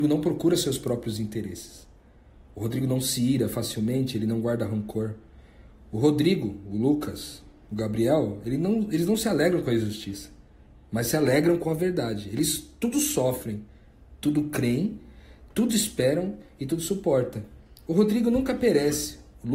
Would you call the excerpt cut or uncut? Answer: uncut